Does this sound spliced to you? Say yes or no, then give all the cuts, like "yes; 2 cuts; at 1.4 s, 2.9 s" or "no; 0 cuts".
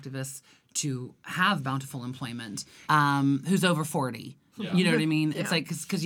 yes; 1 cut; at 2.9 s